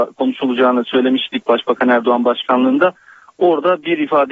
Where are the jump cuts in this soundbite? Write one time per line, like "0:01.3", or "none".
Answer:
none